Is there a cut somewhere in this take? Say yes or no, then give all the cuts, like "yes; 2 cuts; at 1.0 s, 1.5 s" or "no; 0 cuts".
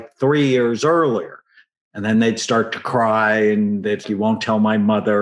yes; 2 cuts; at 1.7 s, 4.0 s